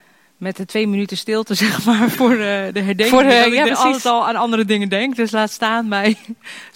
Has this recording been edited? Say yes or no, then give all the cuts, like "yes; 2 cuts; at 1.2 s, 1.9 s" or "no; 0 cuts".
yes; 1 cut; at 3.7 s